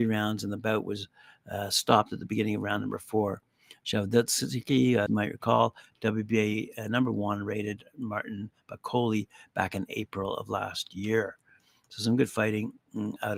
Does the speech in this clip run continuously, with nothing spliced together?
no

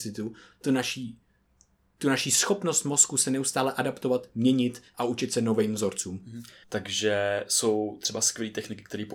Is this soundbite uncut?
no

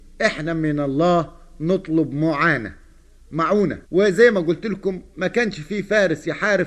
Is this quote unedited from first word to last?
no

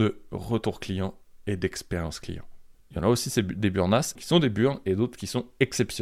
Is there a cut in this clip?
yes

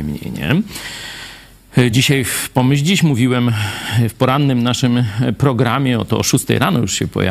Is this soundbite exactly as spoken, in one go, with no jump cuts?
yes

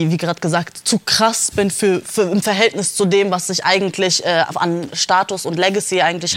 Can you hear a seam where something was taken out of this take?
no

